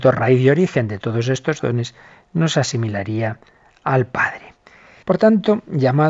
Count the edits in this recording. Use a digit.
1